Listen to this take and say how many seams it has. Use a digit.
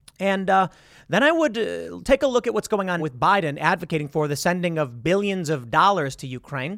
1